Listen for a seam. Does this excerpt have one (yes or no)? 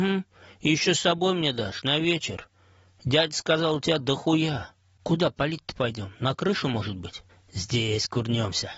no